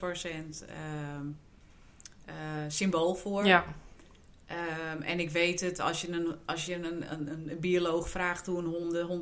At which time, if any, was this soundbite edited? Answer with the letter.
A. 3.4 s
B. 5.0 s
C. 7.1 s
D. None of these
D